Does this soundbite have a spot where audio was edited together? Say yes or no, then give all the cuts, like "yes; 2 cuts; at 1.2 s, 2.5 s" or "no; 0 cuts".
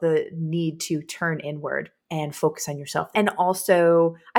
yes; 2 cuts; at 2.0 s, 3.1 s